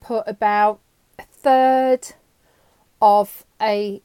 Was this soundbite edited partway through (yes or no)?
no